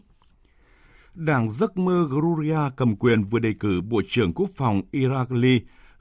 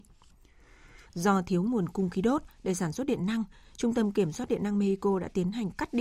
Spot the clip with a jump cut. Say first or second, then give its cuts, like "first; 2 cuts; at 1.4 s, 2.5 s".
second; 1 cut; at 1.0 s